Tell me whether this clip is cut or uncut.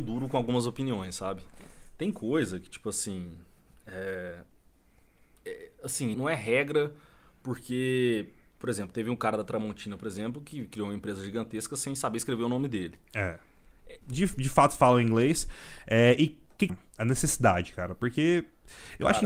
cut